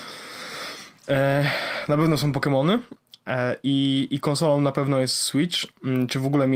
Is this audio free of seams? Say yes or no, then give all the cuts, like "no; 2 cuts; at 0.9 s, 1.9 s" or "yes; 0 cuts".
yes; 0 cuts